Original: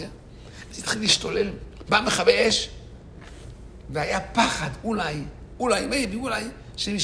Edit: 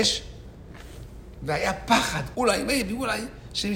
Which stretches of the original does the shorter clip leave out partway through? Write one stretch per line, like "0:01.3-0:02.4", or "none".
0:04.8-0:05.6